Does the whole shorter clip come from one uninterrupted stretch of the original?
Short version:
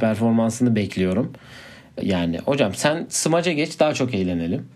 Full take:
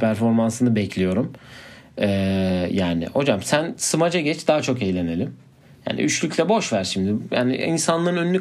no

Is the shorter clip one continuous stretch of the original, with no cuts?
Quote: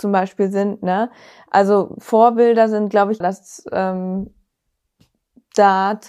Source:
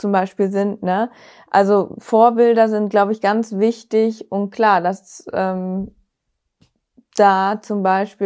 no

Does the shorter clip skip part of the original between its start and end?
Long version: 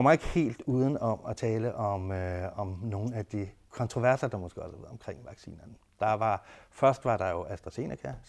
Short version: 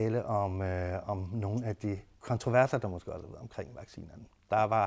no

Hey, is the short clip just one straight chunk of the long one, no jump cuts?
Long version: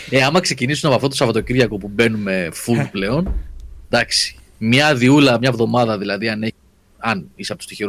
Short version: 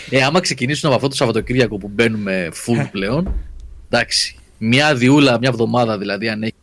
yes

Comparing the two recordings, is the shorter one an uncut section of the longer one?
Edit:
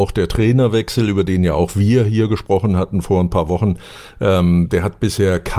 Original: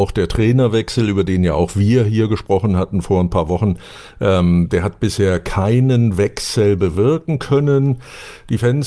yes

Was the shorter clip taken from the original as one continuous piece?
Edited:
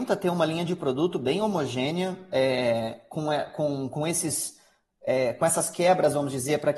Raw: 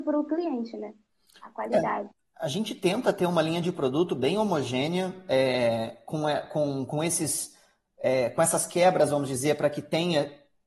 yes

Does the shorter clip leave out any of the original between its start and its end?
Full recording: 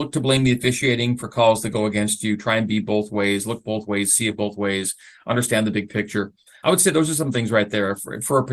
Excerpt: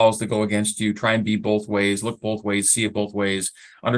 no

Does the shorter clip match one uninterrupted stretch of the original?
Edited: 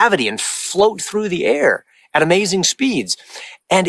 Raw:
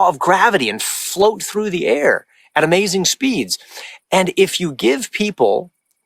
yes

